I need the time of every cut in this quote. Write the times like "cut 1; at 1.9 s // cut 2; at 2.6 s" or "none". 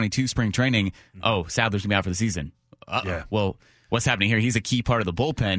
none